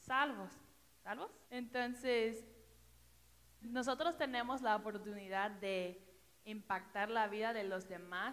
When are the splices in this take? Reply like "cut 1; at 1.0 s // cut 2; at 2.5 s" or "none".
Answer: cut 1; at 1.4 s // cut 2; at 3.6 s